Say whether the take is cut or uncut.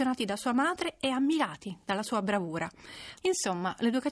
cut